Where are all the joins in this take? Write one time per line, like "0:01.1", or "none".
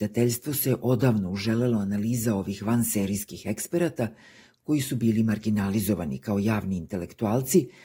none